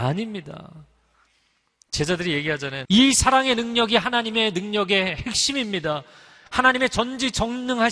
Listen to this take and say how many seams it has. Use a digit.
1